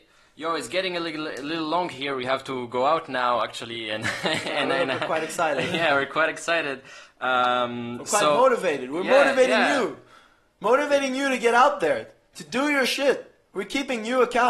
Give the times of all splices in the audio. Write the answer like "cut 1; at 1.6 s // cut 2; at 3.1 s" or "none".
none